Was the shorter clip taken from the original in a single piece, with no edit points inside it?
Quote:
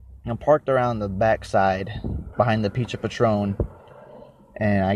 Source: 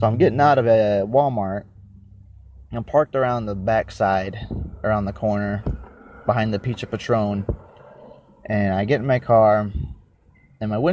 no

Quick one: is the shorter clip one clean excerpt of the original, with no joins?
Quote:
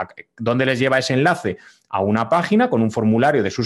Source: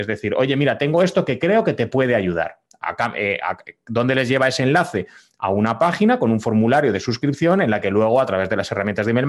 yes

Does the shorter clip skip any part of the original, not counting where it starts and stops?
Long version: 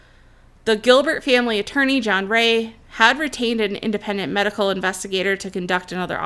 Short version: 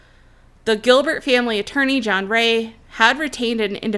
no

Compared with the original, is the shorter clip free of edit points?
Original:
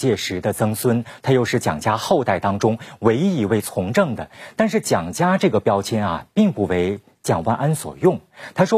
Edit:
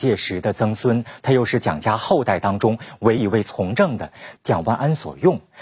no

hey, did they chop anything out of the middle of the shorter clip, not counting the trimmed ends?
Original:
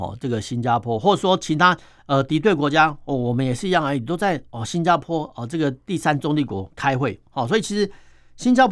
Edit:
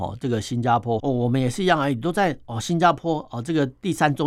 yes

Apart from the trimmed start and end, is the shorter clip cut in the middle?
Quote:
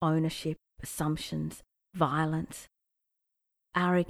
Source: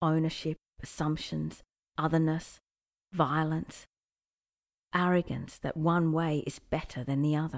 yes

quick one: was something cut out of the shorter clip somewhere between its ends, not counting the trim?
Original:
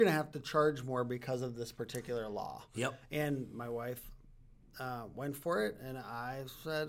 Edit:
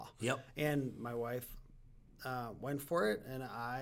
no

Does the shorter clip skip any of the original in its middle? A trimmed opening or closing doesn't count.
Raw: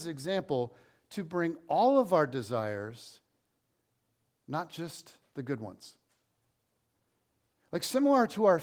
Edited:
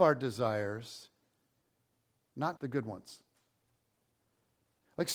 yes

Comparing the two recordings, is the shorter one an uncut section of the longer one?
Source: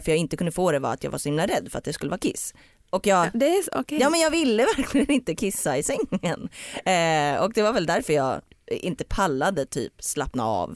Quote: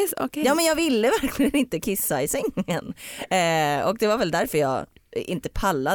yes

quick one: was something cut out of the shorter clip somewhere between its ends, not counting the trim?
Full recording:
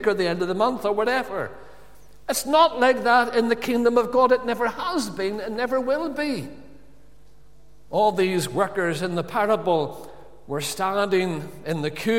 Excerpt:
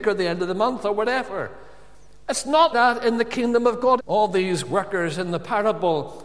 yes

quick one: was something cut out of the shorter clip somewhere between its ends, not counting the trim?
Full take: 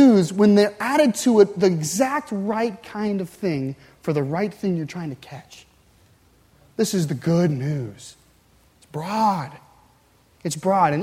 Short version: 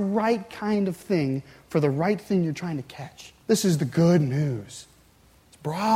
yes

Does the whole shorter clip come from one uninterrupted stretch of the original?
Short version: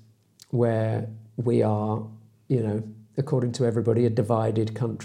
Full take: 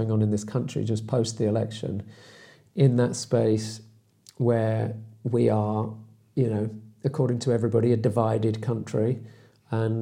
yes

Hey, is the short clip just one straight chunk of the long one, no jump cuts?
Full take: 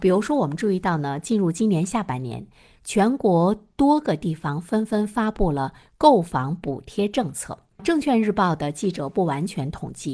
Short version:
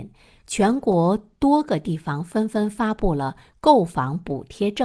yes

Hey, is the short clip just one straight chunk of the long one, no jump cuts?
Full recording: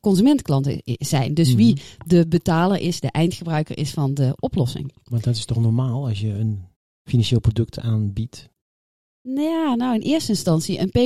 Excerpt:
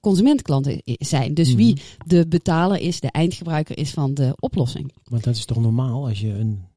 yes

